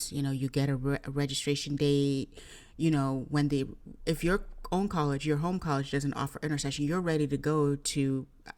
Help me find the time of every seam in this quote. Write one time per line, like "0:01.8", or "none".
none